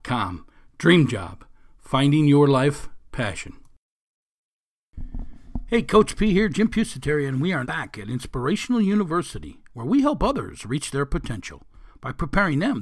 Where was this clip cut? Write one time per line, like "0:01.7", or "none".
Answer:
0:07.6